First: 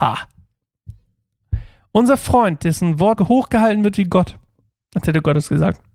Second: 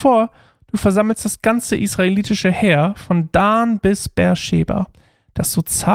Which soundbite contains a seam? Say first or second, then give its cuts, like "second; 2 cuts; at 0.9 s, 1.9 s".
first; 1 cut; at 3.2 s